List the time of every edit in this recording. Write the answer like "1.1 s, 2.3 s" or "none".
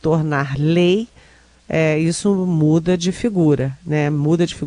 none

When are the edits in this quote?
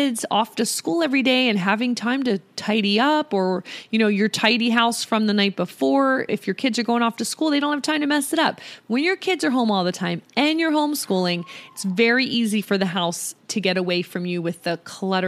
6.3 s

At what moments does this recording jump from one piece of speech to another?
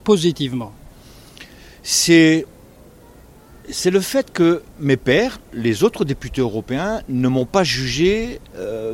4.7 s

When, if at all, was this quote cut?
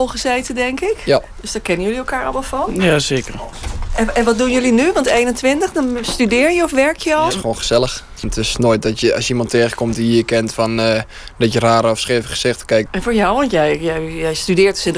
7.3 s, 12.9 s

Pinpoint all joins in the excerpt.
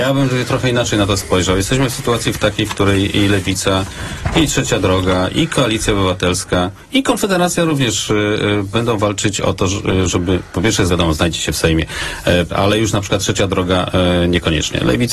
10.9 s, 12.5 s

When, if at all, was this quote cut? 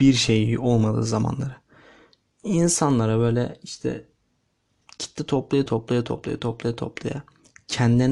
5.7 s

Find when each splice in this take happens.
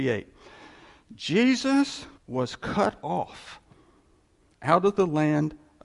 2.2 s

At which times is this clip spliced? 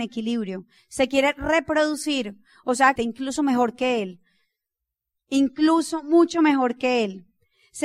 3.0 s

